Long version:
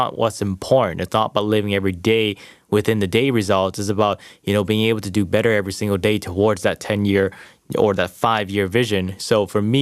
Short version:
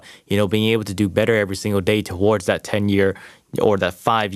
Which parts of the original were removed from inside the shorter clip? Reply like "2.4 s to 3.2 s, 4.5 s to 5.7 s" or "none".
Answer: none